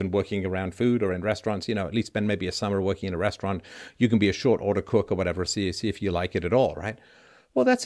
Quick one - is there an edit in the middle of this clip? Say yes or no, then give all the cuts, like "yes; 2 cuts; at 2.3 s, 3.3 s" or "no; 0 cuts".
no; 0 cuts